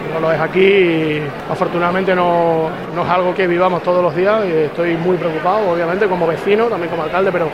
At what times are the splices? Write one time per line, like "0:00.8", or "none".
0:03.3